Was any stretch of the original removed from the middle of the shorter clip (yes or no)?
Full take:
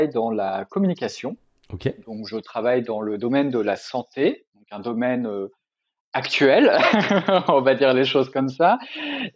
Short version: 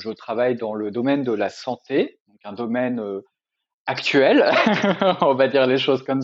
no